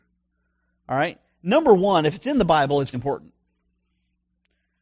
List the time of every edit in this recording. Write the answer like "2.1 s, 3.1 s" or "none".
2.9 s